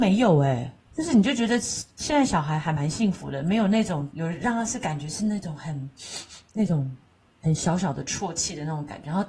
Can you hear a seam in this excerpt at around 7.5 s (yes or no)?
no